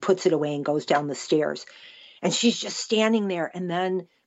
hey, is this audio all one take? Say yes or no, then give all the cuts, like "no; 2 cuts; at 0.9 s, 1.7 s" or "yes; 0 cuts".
yes; 0 cuts